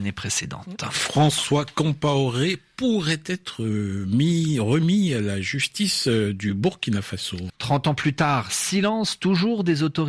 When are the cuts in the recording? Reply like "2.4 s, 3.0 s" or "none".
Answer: 7.5 s

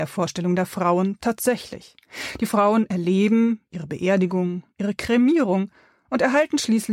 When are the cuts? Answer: none

